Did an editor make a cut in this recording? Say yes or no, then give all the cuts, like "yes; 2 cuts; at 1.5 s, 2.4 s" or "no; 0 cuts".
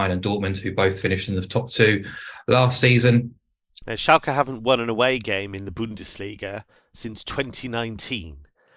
yes; 1 cut; at 3.8 s